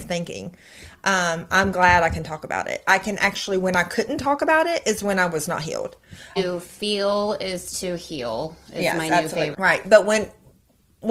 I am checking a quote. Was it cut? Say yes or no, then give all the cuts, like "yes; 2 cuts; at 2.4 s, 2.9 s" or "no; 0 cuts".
yes; 2 cuts; at 6.4 s, 9.5 s